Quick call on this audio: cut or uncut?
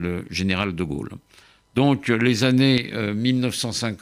uncut